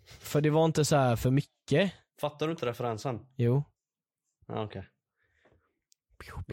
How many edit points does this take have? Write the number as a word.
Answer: zero